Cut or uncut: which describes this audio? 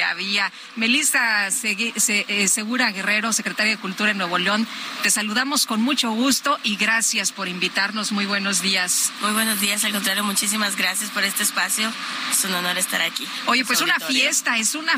uncut